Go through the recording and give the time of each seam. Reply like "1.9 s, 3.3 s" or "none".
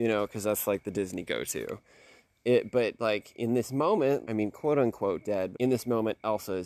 4.2 s, 5.5 s